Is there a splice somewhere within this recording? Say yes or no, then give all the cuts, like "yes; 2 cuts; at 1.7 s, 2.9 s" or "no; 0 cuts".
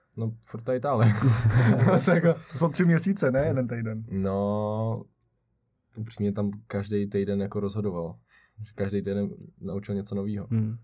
no; 0 cuts